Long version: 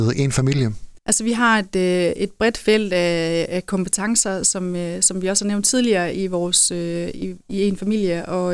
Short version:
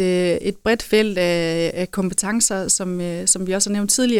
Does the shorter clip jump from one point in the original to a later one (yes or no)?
no